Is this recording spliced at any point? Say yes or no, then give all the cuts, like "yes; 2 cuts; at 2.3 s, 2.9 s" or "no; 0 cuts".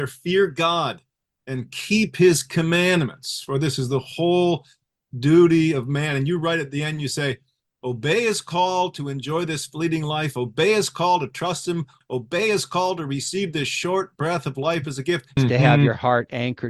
yes; 2 cuts; at 12.0 s, 15.4 s